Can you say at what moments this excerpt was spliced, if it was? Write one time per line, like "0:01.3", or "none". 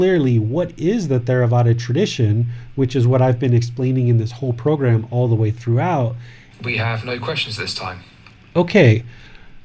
0:06.5